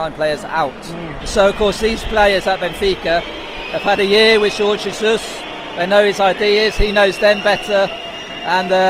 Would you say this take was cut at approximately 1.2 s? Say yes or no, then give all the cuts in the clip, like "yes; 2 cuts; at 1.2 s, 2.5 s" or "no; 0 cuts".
yes; 1 cut; at 1.2 s